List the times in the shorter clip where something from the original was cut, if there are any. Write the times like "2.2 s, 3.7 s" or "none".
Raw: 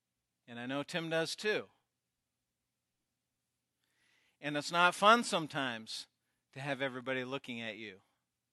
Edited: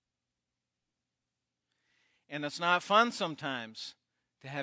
none